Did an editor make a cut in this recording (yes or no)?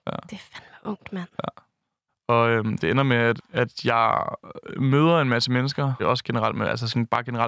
yes